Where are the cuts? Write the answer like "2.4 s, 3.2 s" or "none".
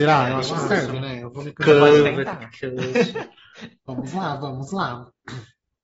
none